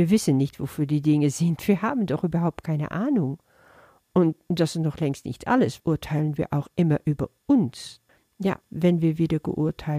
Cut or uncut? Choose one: cut